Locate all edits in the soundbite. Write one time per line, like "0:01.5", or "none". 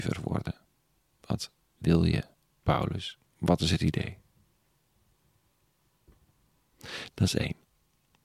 0:03.3
0:07.1